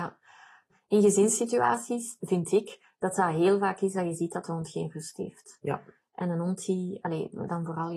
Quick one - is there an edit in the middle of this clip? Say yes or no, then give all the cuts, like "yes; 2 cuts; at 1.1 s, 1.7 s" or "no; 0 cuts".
no; 0 cuts